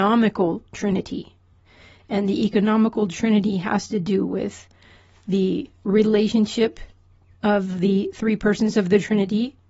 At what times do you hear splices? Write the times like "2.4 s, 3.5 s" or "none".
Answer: 5.8 s